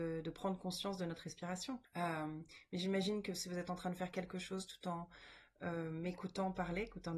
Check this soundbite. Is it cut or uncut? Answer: cut